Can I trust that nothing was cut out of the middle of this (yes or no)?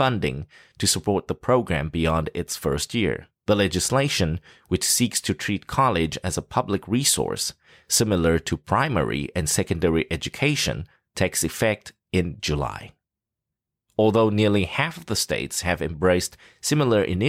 no